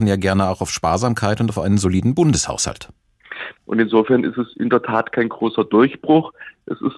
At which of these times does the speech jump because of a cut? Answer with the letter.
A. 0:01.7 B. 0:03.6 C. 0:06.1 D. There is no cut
B